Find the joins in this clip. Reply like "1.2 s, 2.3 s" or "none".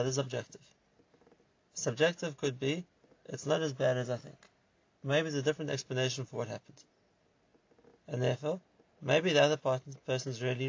none